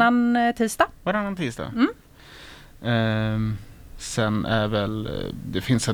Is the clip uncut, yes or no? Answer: yes